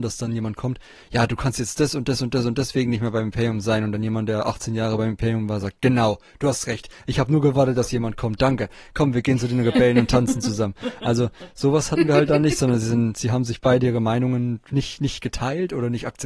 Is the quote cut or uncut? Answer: uncut